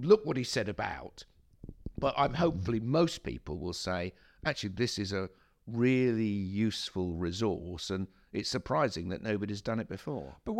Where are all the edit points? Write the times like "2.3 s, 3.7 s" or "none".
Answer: none